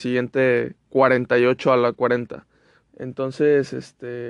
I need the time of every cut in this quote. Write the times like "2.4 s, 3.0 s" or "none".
2.8 s